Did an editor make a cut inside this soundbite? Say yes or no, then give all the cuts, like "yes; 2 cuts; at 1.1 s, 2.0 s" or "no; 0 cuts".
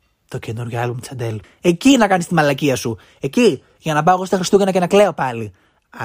yes; 1 cut; at 1.4 s